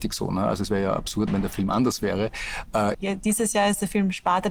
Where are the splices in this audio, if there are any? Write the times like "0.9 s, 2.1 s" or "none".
1.3 s, 2.9 s